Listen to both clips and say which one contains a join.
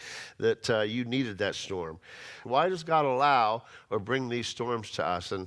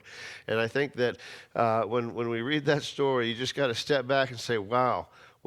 first; 1 cut; at 2.4 s

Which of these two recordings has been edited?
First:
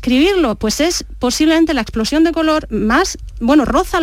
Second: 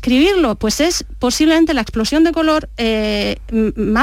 first; 1 cut; at 2.7 s

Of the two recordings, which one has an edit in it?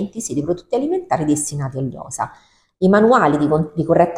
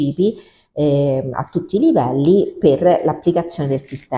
first; 1 cut; at 2.7 s

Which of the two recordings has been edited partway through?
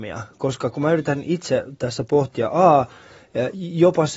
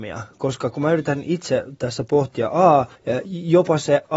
second; 1 cut; at 2.9 s

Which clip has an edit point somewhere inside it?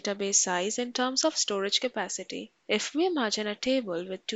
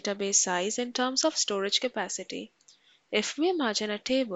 first; 1 cut; at 2.6 s

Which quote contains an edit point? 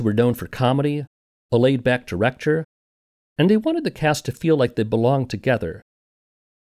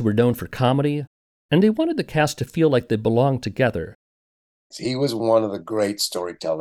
second; 2 cuts; at 1.3 s, 4.7 s

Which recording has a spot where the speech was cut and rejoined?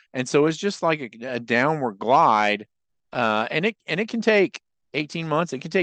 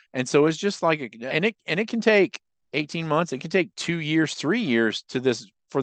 second; 1 cut; at 1.3 s

